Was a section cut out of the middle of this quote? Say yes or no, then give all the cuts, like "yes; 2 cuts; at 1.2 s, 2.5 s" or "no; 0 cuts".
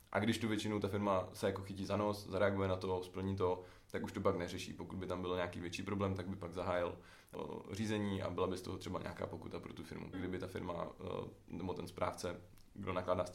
yes; 1 cut; at 10.1 s